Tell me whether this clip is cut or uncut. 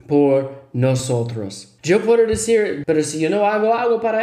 cut